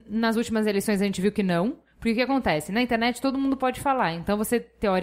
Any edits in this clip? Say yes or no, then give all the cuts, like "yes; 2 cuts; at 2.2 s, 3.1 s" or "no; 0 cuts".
no; 0 cuts